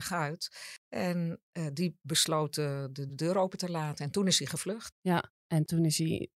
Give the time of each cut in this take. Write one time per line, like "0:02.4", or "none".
0:03.1
0:04.9